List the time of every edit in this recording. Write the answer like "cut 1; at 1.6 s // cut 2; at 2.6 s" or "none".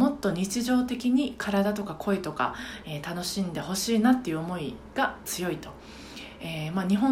none

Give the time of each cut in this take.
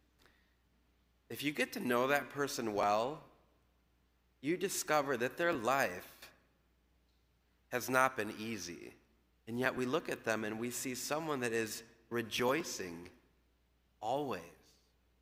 cut 1; at 9.3 s

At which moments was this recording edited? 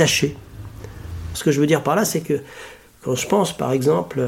cut 1; at 1.3 s

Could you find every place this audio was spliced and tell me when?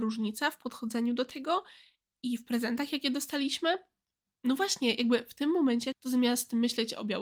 cut 1; at 4.3 s // cut 2; at 5.9 s

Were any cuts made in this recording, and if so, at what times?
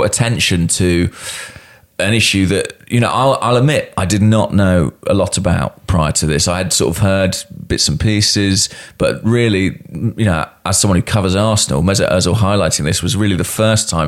none

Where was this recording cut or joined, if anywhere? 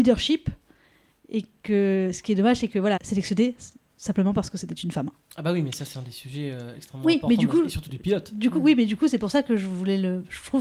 cut 1; at 3.0 s

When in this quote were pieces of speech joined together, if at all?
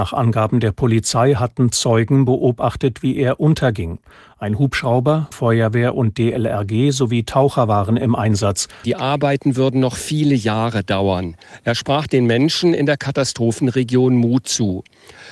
cut 1; at 5.3 s // cut 2; at 8.8 s

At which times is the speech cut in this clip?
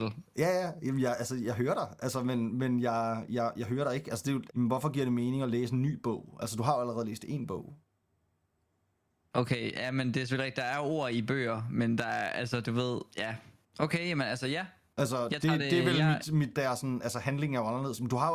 cut 1; at 4.5 s // cut 2; at 16.5 s

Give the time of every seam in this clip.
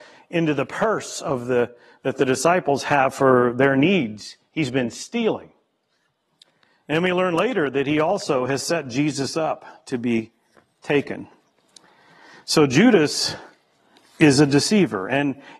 none

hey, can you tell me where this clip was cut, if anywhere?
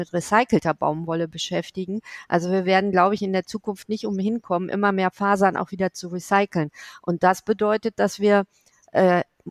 none

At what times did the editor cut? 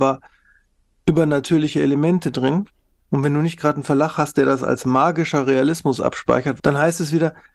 cut 1; at 6.6 s

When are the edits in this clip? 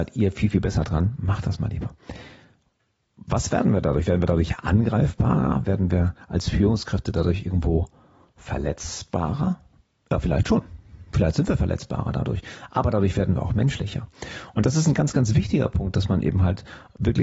none

